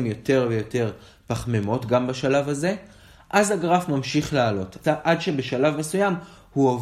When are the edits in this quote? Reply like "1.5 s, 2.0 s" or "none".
4.8 s